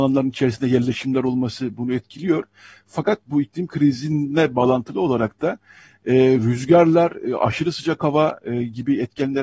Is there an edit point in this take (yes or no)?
no